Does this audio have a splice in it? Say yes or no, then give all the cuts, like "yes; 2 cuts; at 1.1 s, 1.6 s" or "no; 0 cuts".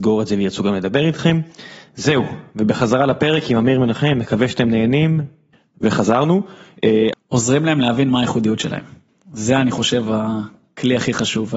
yes; 1 cut; at 7.1 s